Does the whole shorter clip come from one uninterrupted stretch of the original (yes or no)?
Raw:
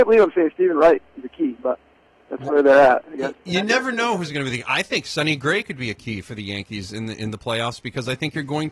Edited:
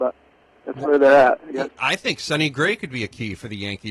no